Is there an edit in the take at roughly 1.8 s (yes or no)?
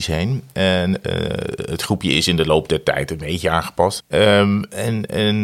no